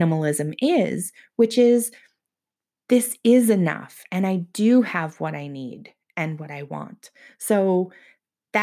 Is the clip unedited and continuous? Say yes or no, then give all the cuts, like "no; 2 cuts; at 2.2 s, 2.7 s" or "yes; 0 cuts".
yes; 0 cuts